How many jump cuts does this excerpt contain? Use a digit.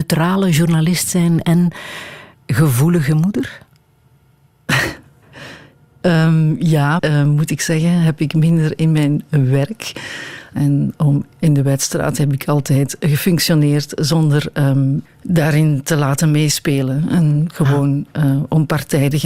3